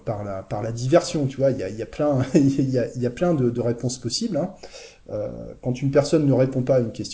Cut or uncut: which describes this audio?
uncut